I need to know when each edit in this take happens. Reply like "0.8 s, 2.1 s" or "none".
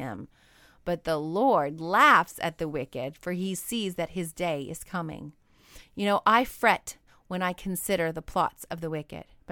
none